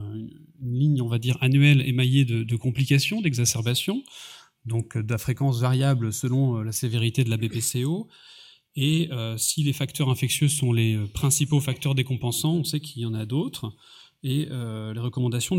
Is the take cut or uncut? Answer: uncut